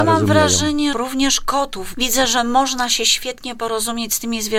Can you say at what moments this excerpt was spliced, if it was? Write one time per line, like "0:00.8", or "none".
0:00.9
0:01.9